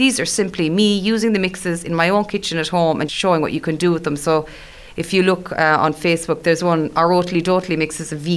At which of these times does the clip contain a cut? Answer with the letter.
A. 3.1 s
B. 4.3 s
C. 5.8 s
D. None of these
A